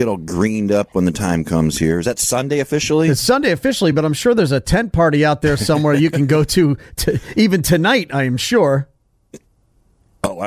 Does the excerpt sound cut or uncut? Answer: uncut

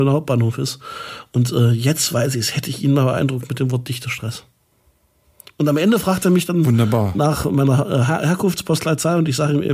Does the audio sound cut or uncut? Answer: uncut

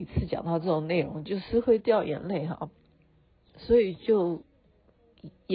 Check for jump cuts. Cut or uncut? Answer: uncut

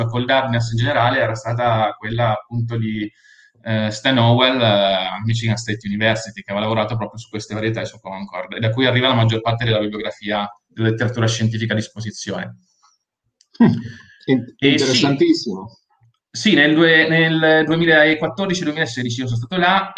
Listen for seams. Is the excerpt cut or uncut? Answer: uncut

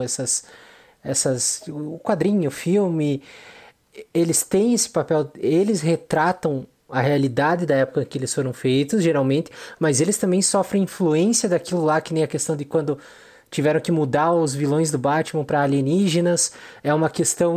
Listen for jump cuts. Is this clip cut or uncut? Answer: uncut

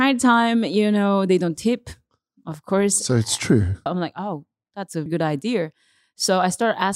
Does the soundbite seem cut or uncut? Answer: cut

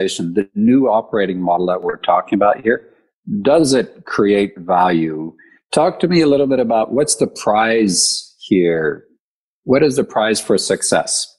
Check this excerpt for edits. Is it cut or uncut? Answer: uncut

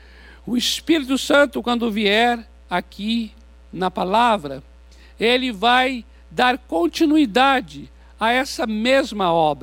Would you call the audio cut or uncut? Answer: uncut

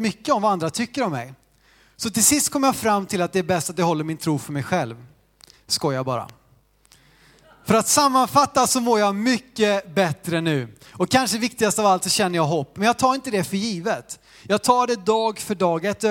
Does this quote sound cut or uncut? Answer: uncut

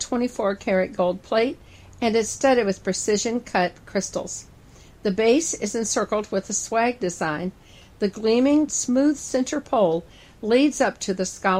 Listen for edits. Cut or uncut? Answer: cut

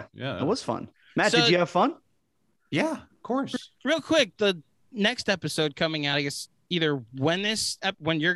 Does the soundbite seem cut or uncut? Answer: uncut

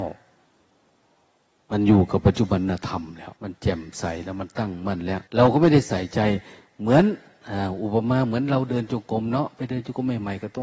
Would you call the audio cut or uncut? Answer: cut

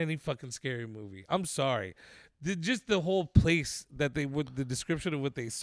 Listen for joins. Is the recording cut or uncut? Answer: uncut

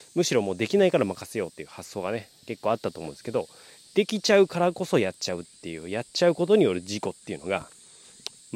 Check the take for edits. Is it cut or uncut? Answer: uncut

